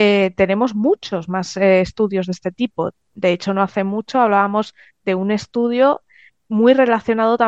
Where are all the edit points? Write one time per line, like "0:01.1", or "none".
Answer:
none